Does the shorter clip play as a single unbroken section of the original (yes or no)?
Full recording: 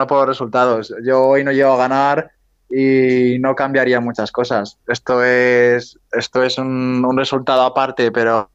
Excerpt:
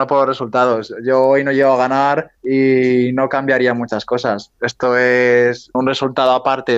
no